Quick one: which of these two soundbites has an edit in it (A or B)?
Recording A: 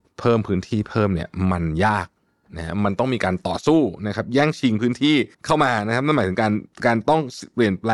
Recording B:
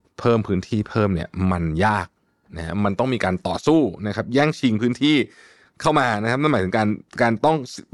A